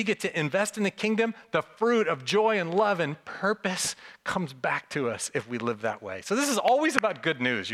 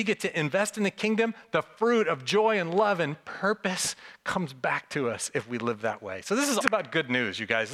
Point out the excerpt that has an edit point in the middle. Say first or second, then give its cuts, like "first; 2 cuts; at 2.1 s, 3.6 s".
second; 1 cut; at 6.6 s